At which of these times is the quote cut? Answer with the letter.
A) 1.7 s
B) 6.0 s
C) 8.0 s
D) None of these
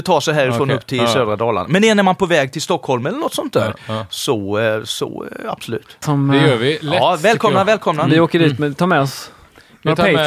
B